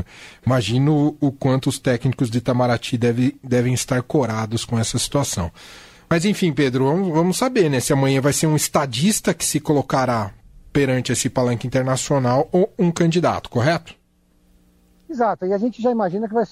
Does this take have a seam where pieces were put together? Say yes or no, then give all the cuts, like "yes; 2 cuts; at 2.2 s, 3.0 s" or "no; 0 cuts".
no; 0 cuts